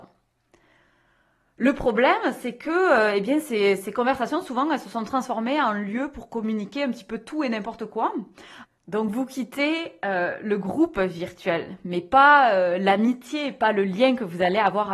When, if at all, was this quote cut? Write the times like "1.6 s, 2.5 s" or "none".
8.6 s

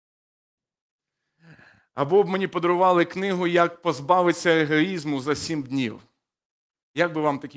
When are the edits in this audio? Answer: none

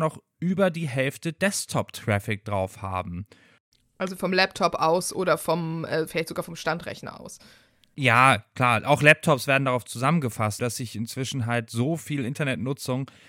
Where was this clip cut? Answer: 10.6 s

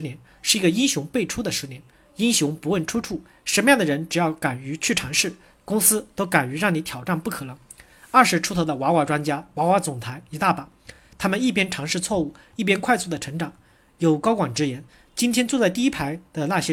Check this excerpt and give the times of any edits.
none

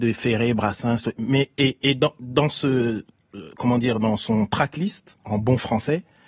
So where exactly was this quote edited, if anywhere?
5.2 s

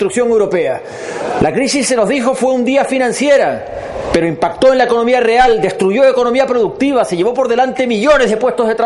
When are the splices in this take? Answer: none

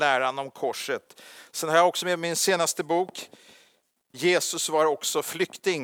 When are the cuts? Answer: 4.1 s

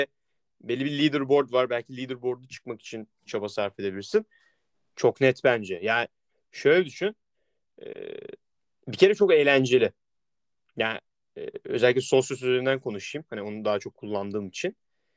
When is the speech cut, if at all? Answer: 4.7 s

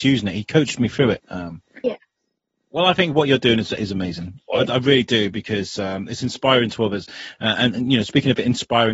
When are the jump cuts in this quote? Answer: 1.2 s, 4.4 s

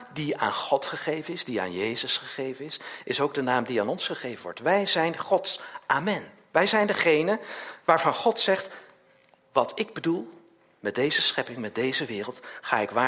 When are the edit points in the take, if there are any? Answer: none

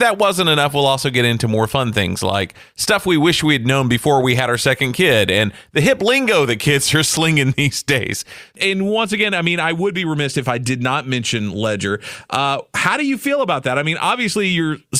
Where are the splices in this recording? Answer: 8.5 s

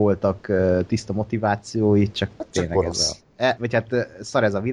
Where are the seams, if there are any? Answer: 3.6 s

